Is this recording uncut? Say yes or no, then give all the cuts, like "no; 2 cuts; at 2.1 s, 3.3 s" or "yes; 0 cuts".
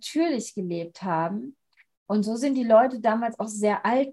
no; 1 cut; at 1.9 s